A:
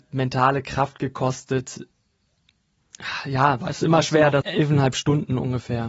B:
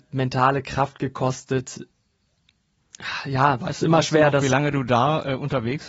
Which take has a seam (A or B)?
A